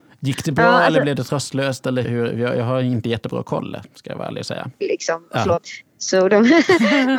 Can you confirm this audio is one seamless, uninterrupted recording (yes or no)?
no